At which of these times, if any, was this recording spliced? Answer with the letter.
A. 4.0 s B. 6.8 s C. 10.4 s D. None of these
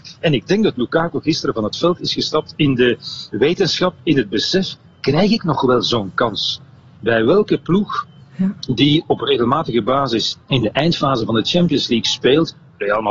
C